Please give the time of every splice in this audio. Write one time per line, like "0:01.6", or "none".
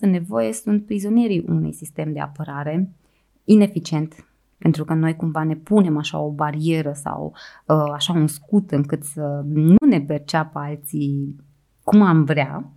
0:04.5